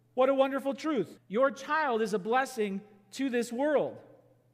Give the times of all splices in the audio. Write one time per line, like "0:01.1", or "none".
0:01.2